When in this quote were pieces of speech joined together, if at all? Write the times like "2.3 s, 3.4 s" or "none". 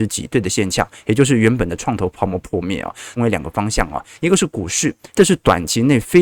3.2 s, 5.1 s